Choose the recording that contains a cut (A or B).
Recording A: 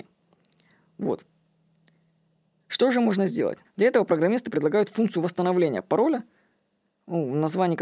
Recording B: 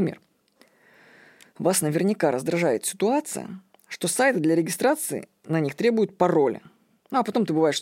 A